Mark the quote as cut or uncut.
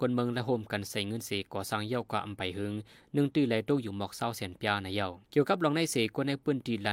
cut